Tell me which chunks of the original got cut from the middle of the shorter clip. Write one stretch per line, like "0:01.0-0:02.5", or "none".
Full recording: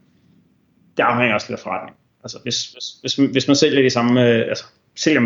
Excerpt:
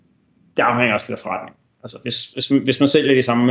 0:02.7-0:03.0